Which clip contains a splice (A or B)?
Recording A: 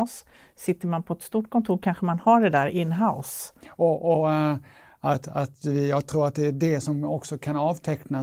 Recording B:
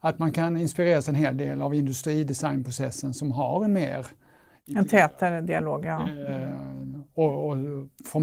A